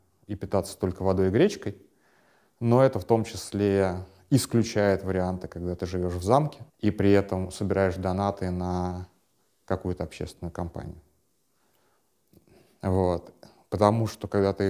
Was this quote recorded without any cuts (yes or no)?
no